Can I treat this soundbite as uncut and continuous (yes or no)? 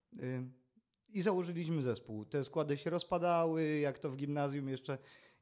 yes